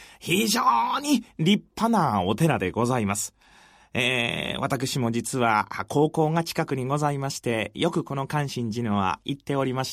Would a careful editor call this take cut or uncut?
uncut